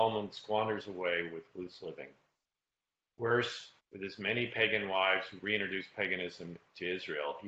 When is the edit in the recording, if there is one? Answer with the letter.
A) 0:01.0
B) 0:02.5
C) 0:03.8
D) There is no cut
C